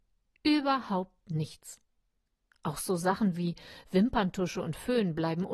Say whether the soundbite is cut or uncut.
uncut